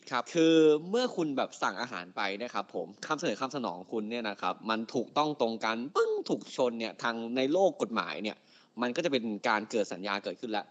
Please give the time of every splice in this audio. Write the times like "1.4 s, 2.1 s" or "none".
none